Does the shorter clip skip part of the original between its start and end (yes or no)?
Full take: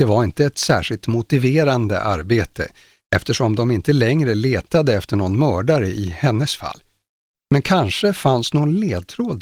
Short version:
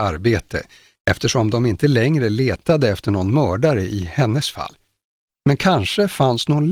no